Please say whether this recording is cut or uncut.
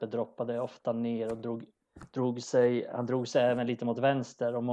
uncut